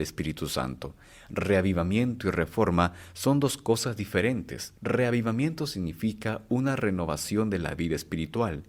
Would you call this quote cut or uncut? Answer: cut